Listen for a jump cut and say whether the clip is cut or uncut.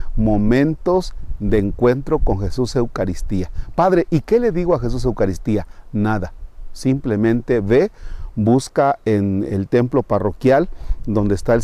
uncut